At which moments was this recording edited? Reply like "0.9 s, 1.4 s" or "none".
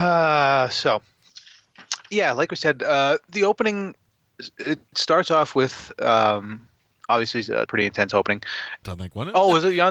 7.7 s, 8.8 s